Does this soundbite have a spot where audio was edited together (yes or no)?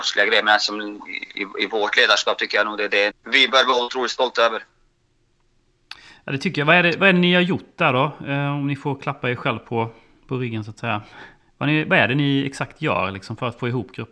yes